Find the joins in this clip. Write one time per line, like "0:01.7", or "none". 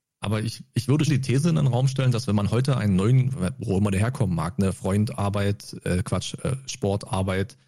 0:01.1